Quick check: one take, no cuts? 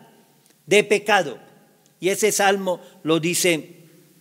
yes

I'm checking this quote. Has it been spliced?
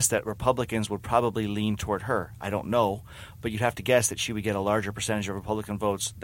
no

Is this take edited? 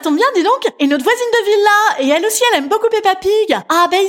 no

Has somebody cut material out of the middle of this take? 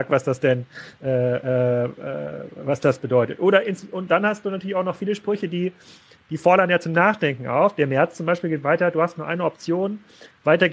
no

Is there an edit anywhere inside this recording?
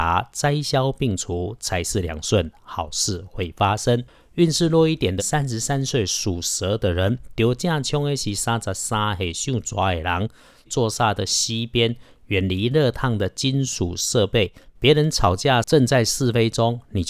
yes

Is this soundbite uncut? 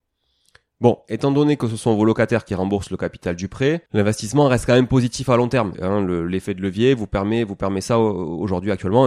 no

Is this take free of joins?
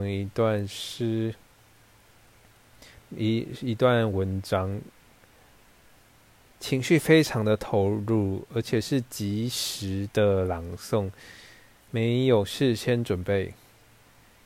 yes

